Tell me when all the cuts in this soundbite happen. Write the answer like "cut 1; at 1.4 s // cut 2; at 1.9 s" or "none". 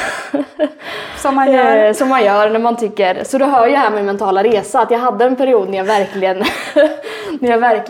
none